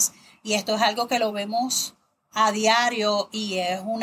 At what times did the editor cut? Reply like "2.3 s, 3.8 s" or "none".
none